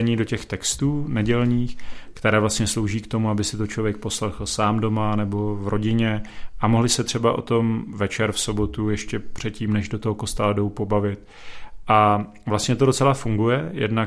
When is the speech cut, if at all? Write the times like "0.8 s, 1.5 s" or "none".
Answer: none